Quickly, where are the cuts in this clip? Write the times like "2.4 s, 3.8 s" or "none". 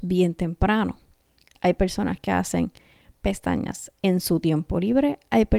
1.5 s